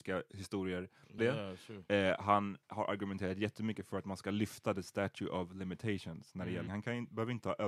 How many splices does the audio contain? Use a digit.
2